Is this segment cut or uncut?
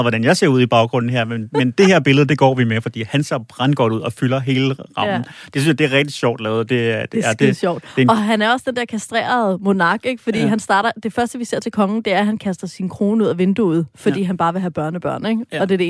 uncut